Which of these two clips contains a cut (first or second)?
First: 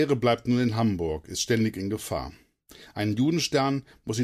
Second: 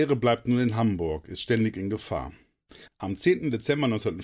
second